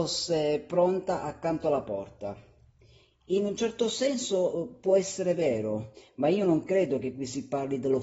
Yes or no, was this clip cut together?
no